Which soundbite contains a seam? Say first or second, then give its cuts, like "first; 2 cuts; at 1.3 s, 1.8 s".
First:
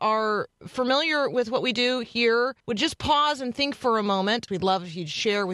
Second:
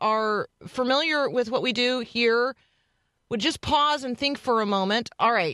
first; 2 cuts; at 2.6 s, 4.5 s